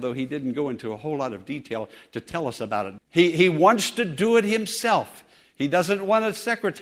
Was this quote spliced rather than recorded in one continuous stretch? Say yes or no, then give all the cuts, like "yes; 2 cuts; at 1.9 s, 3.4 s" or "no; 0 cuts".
yes; 1 cut; at 3.0 s